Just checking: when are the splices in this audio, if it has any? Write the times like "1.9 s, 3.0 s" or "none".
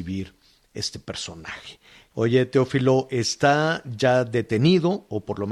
2.1 s